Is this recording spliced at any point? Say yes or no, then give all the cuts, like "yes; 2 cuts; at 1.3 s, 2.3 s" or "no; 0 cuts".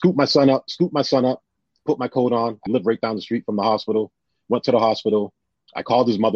yes; 1 cut; at 2.7 s